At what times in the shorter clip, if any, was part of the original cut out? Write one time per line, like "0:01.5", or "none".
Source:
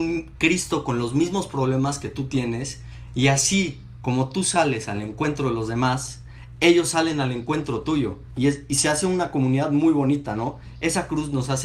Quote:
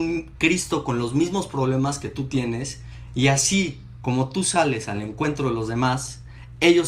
none

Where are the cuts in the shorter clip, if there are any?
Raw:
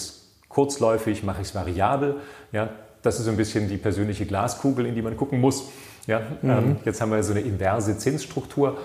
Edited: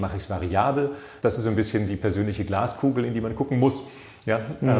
0:01.2

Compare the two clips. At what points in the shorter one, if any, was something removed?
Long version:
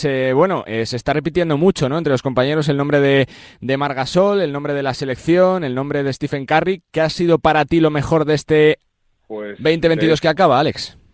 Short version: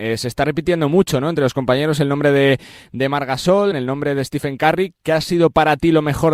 0:03.7

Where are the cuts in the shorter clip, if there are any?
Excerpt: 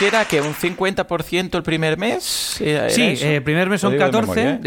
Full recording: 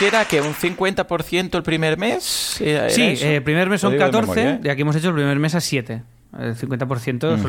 none

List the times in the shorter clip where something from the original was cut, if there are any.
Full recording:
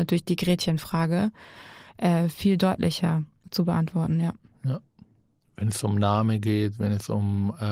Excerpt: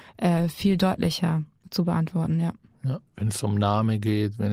0:03.1

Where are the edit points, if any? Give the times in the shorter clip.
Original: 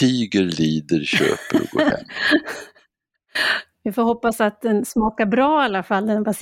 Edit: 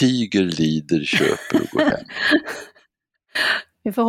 none

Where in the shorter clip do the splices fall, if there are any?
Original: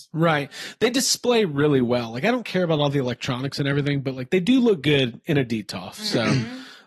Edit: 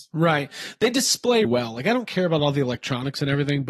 0:01.4

